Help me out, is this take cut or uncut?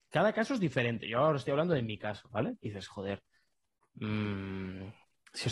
uncut